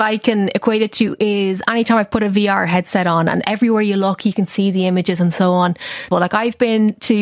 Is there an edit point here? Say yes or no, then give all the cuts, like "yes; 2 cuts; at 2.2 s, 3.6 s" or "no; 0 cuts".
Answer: yes; 1 cut; at 6.1 s